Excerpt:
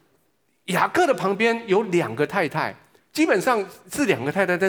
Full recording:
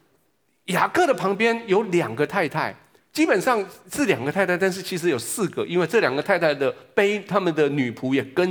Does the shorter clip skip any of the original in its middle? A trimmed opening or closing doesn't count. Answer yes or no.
no